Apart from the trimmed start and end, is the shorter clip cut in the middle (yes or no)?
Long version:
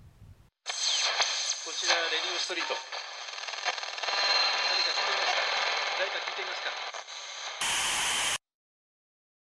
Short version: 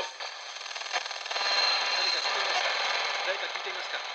no